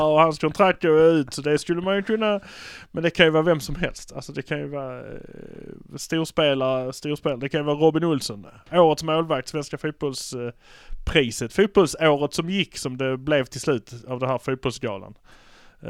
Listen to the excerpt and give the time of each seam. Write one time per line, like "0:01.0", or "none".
none